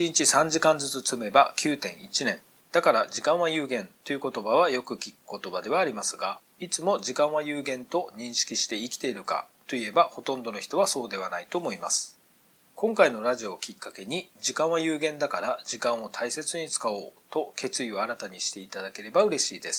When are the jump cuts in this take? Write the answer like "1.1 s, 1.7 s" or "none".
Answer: 2.6 s

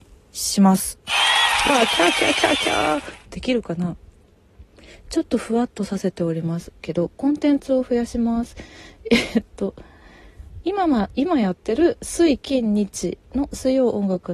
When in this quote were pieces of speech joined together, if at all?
1.7 s

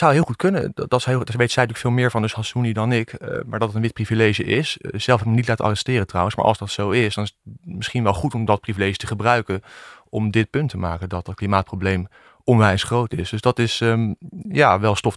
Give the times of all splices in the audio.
none

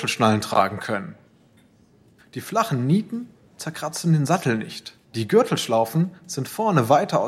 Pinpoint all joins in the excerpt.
2.2 s, 5.0 s

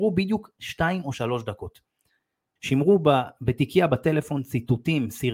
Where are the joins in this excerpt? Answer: 2.6 s

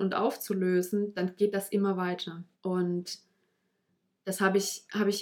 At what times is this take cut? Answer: 2.5 s

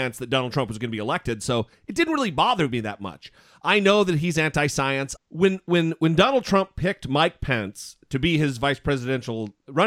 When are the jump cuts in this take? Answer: 5.2 s

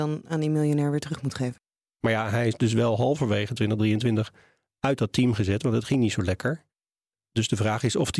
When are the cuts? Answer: 2.0 s

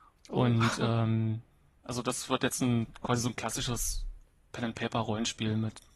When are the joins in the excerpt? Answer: none

